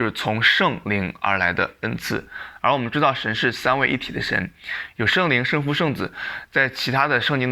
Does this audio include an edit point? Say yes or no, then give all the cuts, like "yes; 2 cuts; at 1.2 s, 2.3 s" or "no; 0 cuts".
no; 0 cuts